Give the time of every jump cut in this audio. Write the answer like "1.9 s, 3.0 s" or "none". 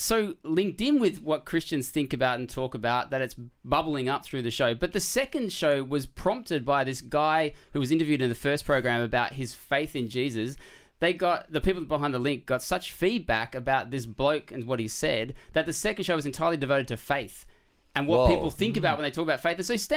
none